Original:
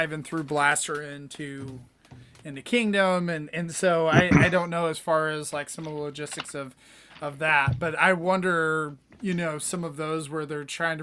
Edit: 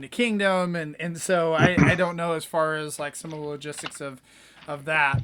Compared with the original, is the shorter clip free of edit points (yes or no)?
yes